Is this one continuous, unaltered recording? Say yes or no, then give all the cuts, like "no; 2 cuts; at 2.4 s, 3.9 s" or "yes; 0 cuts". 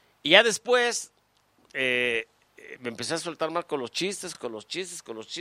yes; 0 cuts